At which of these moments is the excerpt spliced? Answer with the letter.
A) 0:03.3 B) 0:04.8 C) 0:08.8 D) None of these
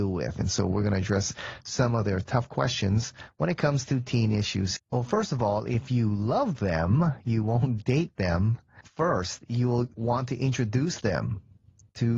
B